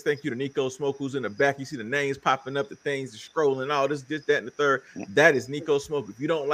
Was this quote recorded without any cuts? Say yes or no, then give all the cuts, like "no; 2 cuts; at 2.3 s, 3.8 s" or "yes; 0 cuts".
yes; 0 cuts